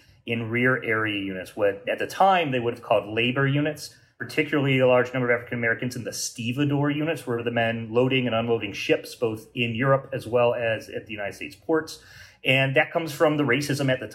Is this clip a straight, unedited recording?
yes; 0 cuts

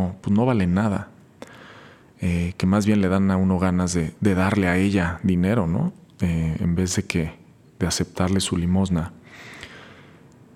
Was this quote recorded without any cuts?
yes; 0 cuts

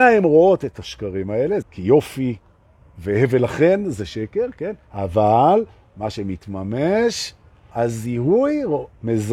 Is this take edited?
yes; 2 cuts; at 1.6 s, 7.7 s

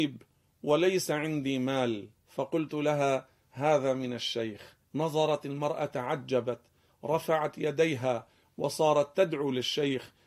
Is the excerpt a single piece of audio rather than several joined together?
no; 2 cuts; at 2.2 s, 4.8 s

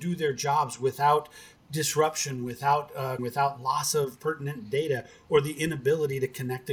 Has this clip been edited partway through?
yes; 1 cut; at 3.2 s

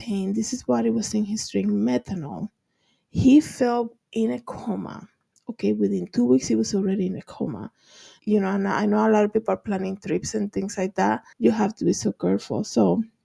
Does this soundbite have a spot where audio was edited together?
yes; 2 cuts; at 8.2 s, 11.3 s

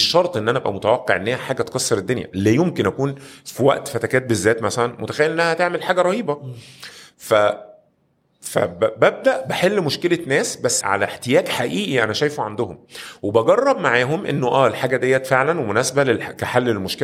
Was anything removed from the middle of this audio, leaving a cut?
yes; 1 cut; at 10.8 s

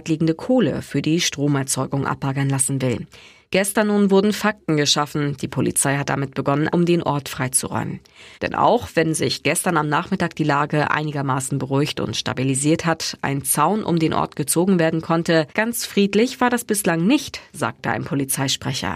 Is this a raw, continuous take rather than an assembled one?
no; 3 cuts; at 6.7 s, 8.3 s, 15.5 s

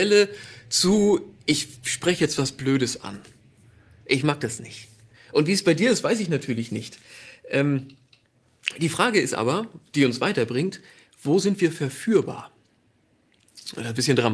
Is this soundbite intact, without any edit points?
no; 1 cut; at 5.1 s

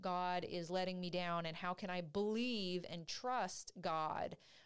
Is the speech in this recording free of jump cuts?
yes; 0 cuts

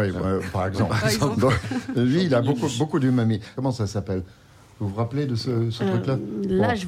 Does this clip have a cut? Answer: yes; 2 cuts; at 1.6 s, 3.6 s

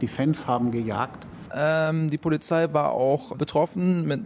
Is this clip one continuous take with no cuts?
no; 2 cuts; at 1.5 s, 3.3 s

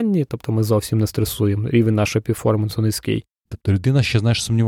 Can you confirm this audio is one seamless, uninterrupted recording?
no; 1 cut; at 3.5 s

